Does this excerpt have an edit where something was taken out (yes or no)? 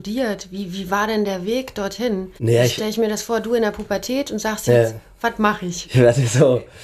yes